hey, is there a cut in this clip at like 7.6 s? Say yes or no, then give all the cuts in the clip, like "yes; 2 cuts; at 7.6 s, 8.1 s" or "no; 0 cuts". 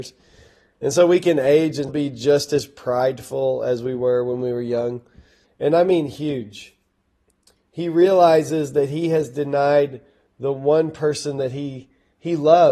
no; 2 cuts; at 1.9 s, 5.4 s